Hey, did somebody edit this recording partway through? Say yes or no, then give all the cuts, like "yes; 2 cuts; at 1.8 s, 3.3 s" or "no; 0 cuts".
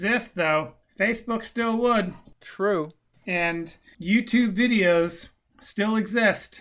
no; 0 cuts